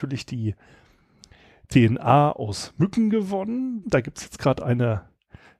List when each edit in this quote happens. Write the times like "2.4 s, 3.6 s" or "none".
3.8 s